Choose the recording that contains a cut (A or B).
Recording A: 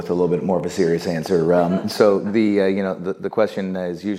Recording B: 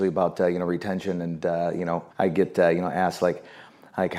B